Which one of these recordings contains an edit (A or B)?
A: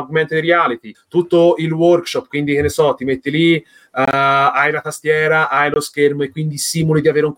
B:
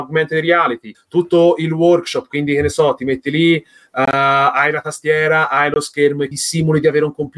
B